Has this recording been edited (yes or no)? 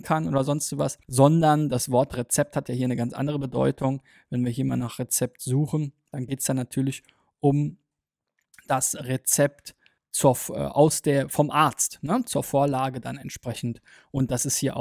yes